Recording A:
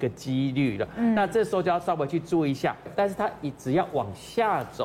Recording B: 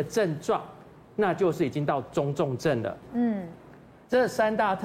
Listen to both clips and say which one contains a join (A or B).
B